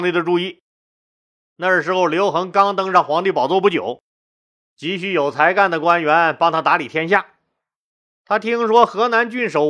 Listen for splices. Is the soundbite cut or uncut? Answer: uncut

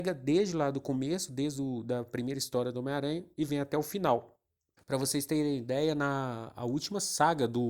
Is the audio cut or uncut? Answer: cut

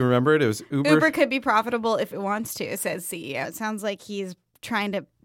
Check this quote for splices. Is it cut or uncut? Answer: cut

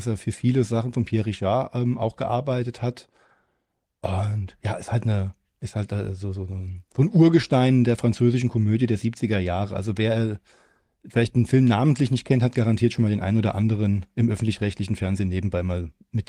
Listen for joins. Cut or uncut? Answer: uncut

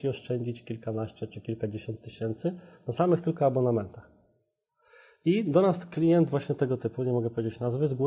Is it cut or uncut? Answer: uncut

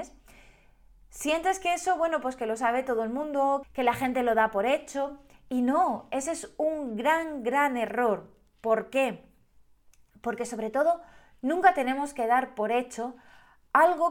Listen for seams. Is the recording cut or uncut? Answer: cut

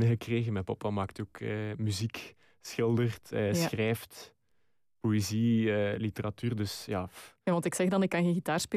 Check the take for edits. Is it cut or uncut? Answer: uncut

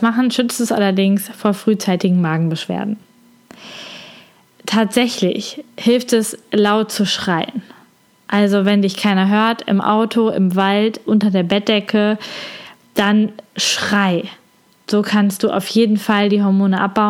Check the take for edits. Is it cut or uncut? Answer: uncut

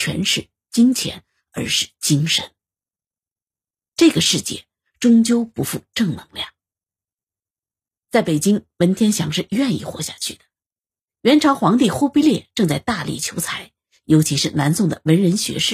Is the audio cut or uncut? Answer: uncut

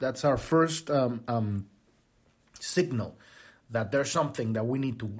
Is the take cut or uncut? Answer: uncut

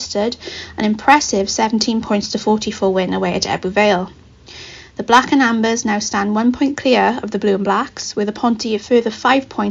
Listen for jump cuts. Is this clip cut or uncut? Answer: uncut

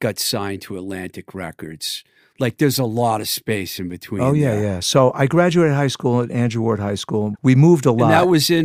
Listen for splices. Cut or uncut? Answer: cut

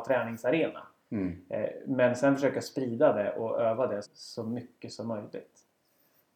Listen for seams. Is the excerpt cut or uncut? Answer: cut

